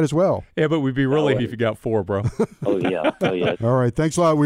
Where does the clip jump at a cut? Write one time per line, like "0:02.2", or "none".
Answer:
0:01.4
0:03.5